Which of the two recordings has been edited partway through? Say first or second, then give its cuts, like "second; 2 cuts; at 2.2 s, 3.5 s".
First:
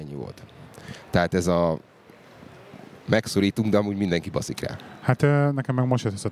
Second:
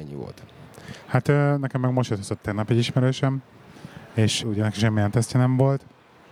second; 2 cuts; at 1.1 s, 4.4 s